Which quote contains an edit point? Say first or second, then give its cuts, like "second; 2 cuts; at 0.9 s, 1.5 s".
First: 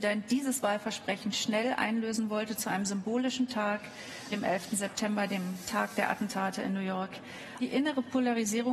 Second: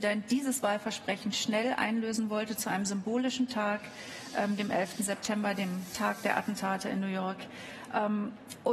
first; 2 cuts; at 4.3 s, 7.6 s